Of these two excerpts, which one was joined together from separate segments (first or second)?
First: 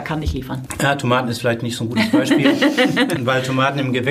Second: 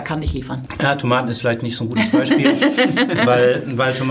first